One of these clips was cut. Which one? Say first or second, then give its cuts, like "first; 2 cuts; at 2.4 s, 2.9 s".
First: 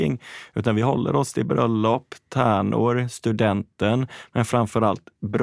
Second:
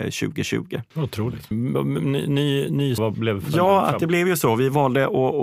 second; 2 cuts; at 1.5 s, 3.0 s